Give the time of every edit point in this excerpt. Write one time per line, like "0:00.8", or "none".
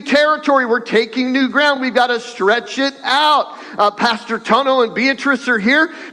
none